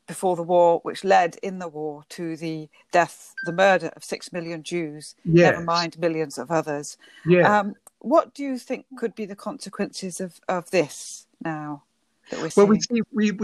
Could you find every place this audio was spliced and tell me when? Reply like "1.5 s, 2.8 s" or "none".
none